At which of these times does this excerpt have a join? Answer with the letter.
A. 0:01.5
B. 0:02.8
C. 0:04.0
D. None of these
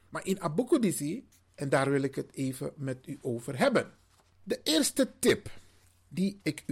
A